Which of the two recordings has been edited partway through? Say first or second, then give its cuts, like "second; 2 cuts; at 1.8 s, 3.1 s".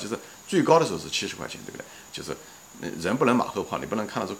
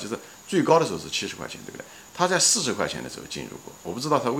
first; 1 cut; at 2.1 s